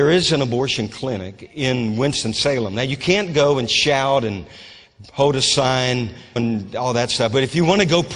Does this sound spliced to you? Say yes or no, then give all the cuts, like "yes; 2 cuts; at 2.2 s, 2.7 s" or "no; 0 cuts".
yes; 1 cut; at 6.4 s